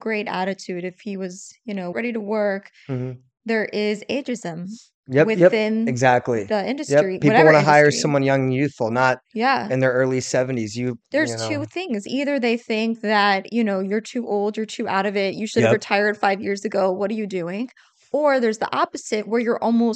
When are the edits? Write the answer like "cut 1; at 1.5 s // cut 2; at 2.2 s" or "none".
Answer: cut 1; at 1.9 s